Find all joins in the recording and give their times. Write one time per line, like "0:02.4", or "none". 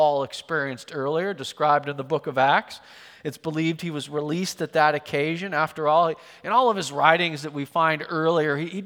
none